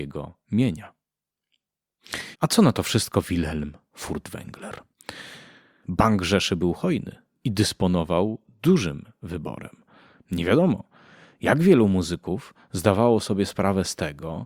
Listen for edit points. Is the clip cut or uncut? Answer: cut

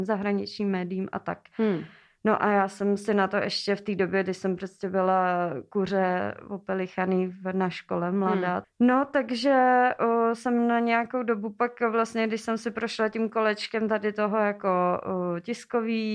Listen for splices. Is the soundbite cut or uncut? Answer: cut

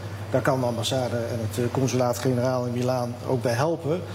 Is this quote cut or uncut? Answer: uncut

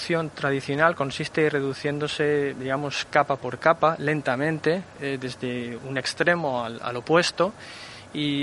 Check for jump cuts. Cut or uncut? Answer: cut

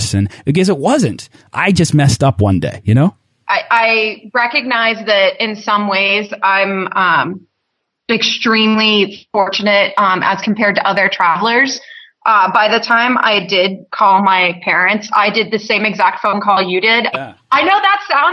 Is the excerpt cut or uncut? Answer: cut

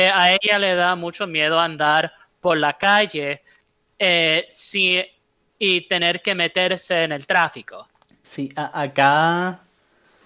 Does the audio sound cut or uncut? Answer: uncut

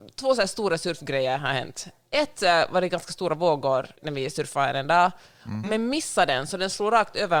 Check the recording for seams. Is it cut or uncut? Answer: cut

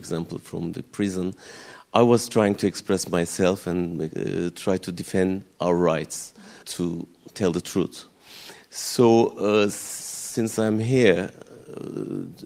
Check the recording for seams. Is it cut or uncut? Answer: cut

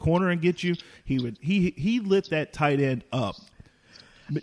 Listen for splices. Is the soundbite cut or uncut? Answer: uncut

